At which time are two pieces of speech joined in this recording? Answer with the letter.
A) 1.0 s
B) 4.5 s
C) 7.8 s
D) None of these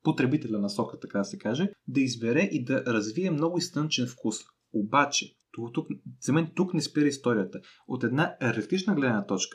D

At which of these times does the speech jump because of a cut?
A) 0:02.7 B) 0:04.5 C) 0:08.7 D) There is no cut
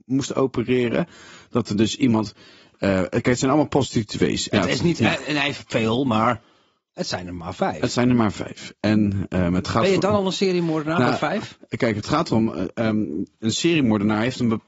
B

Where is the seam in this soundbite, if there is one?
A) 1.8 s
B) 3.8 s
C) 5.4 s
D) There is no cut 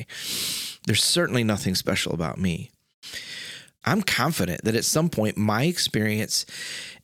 B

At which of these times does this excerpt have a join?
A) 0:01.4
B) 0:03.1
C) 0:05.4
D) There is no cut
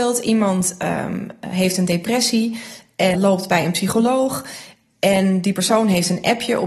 B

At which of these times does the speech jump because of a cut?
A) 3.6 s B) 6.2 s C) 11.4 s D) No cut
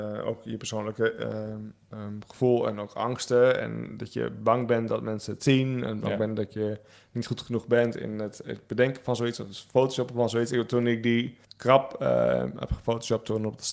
C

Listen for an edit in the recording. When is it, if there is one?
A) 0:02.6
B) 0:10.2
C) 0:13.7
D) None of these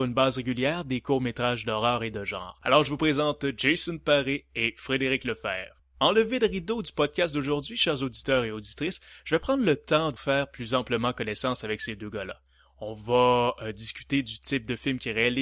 B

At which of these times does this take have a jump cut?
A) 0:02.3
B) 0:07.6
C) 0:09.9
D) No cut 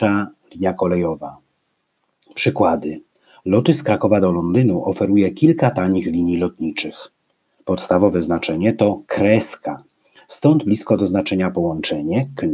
B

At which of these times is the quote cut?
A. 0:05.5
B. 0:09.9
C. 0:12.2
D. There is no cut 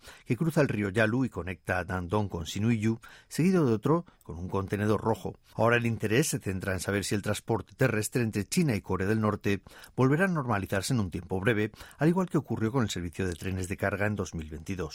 A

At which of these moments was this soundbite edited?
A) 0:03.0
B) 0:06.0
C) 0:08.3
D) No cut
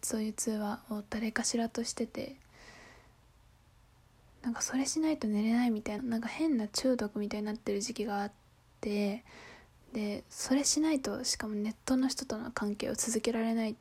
B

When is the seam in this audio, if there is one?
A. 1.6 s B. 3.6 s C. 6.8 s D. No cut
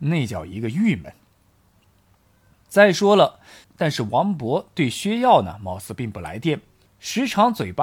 B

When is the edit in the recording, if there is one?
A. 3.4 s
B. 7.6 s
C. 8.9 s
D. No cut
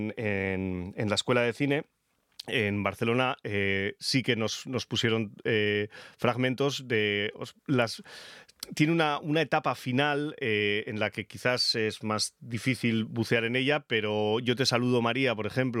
B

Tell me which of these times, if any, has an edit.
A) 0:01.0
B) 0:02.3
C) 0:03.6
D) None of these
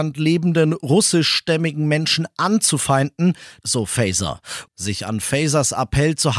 C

